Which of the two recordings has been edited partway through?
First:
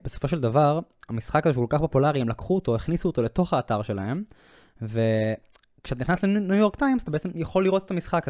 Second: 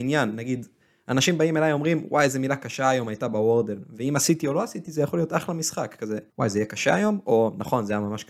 second; 1 cut; at 6.3 s

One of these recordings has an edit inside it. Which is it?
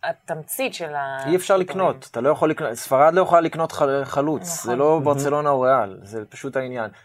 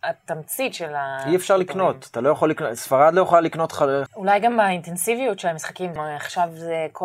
second; 2 cuts; at 4.1 s, 6.0 s

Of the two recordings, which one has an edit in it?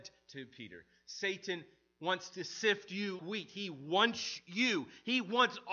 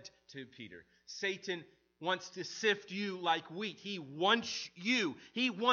first; 1 cut; at 3.2 s

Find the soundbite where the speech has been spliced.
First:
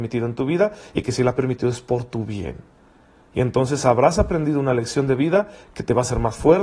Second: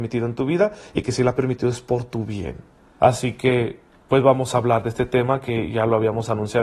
second; 1 cut; at 3.0 s

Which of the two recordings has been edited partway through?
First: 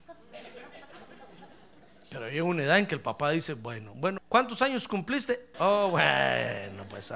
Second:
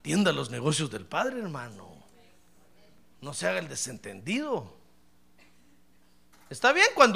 first; 2 cuts; at 4.2 s, 5.5 s

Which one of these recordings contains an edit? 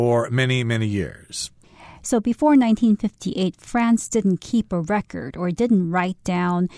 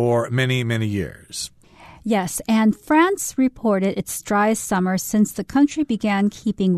first; 1 cut; at 2.0 s

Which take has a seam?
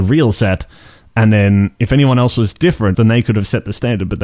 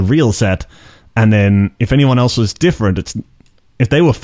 first; 1 cut; at 2.9 s

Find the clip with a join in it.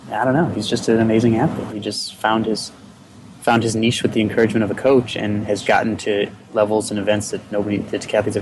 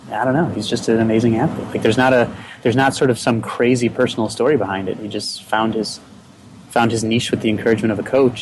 first; 2 cuts; at 1.7 s, 5.6 s

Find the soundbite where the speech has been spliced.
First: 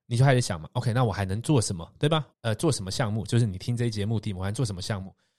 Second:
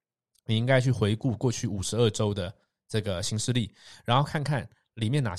first; 1 cut; at 2.3 s

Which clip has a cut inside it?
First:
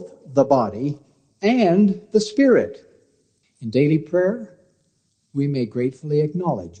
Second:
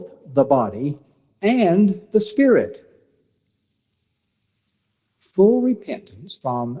first; 1 cut; at 3.4 s

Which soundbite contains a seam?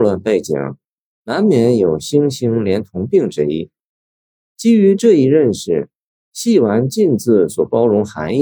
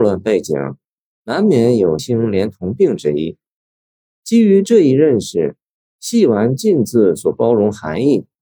second; 1 cut; at 2.0 s

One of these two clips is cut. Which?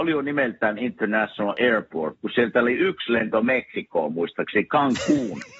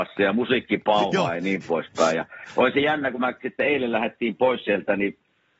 first; 1 cut; at 2.1 s

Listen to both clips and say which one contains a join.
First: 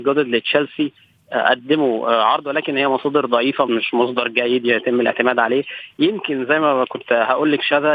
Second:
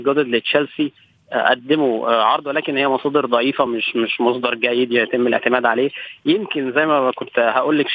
first; 1 cut; at 3.7 s

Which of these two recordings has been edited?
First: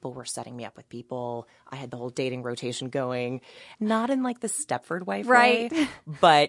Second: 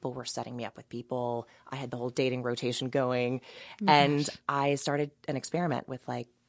first; 1 cut; at 3.7 s

